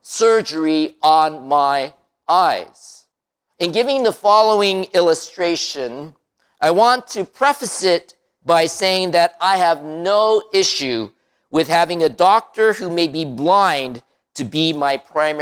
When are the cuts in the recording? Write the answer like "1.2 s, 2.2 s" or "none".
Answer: 3.5 s